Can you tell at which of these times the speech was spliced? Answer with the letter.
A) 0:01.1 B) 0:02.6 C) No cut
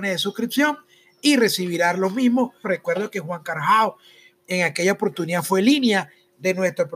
B